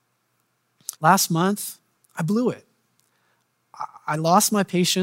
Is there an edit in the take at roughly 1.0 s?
yes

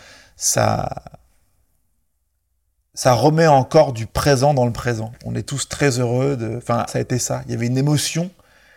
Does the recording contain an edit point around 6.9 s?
yes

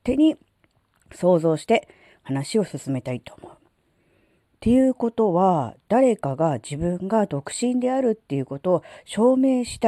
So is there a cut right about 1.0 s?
no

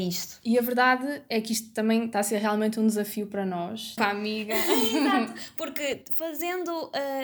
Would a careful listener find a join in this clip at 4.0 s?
yes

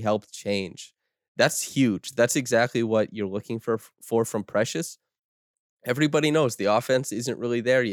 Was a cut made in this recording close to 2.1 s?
no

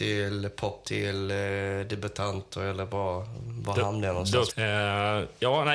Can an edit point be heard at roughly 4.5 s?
yes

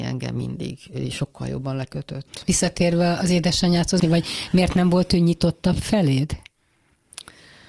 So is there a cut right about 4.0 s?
yes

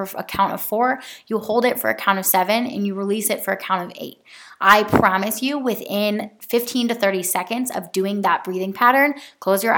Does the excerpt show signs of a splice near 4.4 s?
no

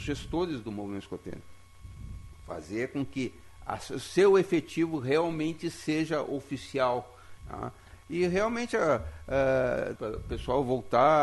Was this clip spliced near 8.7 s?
no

